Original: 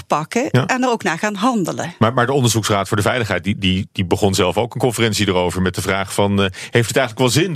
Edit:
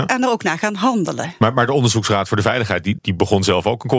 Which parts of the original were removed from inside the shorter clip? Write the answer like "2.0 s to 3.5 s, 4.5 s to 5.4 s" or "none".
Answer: 3.6 s to 3.9 s

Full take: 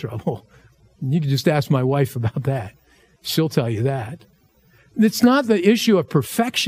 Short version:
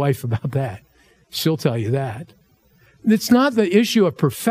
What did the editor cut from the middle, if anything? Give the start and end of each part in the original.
none

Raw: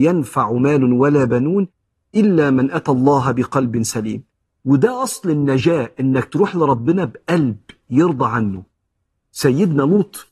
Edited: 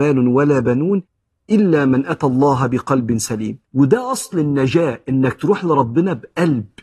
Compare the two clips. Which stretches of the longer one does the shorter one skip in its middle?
4.3 s to 4.6 s

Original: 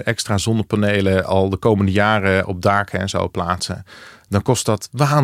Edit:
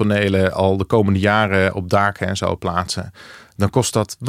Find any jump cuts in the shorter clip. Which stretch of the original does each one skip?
none

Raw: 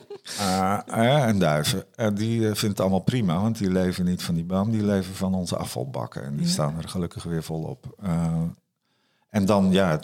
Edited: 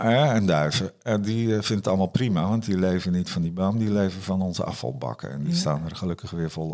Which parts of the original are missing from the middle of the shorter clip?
none

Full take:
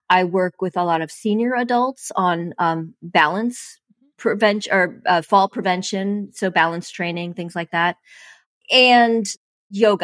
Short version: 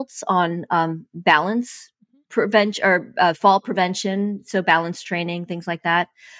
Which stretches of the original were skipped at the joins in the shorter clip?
none

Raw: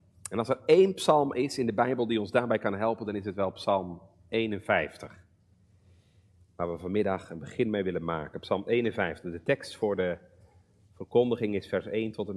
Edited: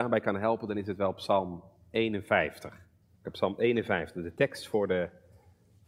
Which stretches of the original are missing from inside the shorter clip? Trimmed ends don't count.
5.6 s to 8.3 s

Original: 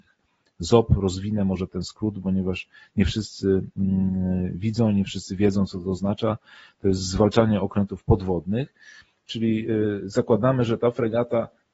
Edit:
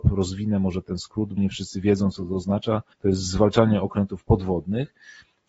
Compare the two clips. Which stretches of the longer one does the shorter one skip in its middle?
2.2 s to 4.9 s, 6.5 s to 6.7 s

